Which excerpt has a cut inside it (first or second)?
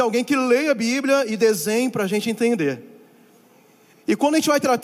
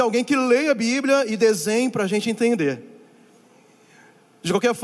first